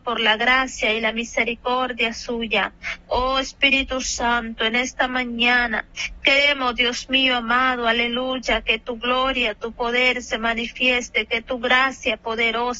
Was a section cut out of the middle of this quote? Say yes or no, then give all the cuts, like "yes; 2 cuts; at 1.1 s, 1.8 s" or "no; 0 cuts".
no; 0 cuts